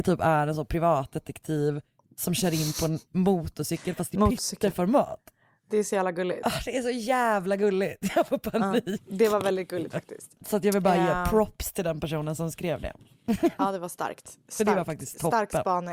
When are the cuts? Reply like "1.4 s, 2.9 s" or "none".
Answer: 10.4 s